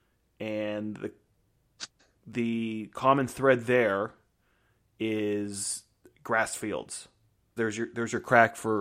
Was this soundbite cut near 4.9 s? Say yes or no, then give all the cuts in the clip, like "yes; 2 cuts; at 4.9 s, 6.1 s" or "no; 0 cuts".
no; 1 cut; at 7.6 s